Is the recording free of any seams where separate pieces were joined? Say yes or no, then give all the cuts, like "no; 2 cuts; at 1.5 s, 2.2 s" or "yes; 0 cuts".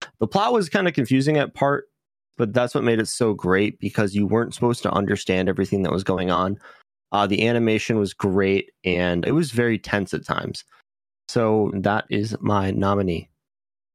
no; 2 cuts; at 9.2 s, 11.7 s